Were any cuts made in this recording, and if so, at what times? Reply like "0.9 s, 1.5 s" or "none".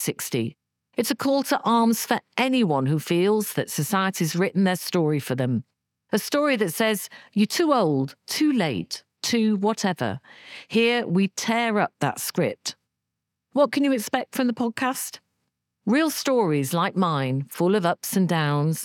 none